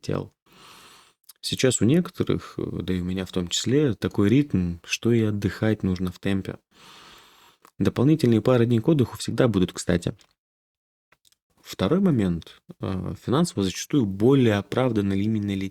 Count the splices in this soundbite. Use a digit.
0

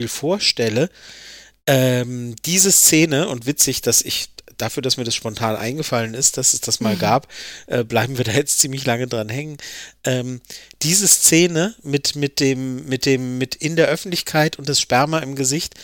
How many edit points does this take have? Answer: 0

